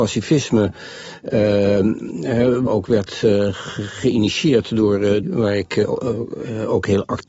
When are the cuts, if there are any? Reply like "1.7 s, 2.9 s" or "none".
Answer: 2.7 s, 5.2 s